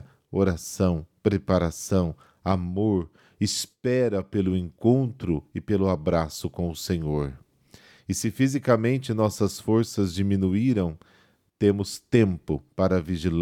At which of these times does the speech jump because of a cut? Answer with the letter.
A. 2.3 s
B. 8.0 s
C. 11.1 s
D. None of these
B